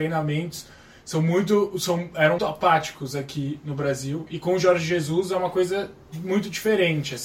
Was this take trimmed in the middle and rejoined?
yes; 1 cut; at 2.4 s

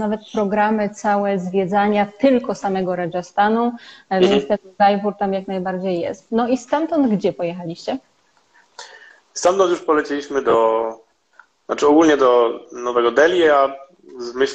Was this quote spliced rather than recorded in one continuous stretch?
no; 0 cuts

